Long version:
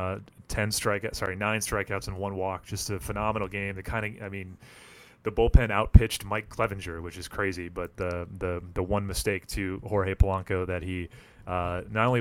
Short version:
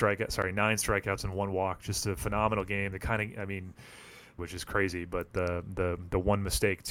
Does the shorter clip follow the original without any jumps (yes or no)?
no